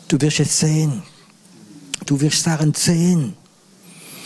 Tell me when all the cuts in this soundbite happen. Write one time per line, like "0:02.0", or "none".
0:02.1